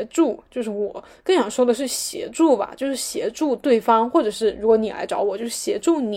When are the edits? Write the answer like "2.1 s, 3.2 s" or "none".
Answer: none